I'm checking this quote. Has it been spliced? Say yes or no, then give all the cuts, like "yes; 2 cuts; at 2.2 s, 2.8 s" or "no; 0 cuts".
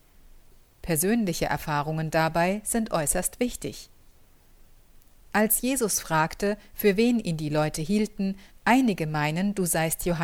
yes; 1 cut; at 8.5 s